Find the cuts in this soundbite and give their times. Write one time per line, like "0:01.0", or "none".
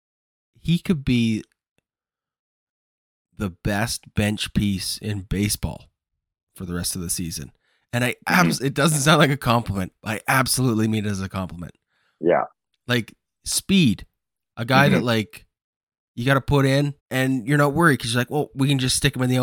0:14.5
0:17.0